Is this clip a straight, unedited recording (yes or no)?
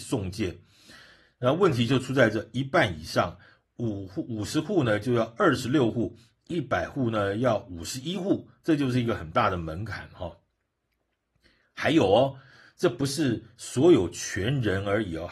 yes